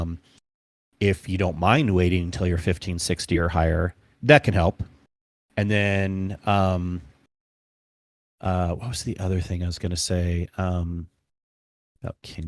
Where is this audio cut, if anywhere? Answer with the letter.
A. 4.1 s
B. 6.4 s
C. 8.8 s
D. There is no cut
A